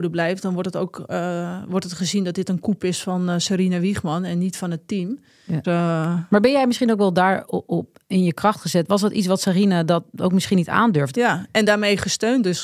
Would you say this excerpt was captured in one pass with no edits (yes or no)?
no